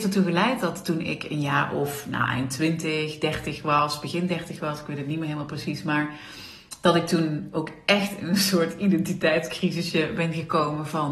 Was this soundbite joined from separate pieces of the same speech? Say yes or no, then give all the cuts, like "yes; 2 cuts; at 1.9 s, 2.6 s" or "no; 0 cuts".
no; 0 cuts